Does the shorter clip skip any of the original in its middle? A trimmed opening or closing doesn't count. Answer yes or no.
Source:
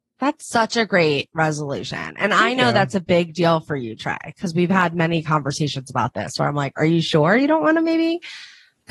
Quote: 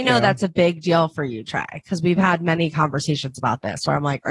no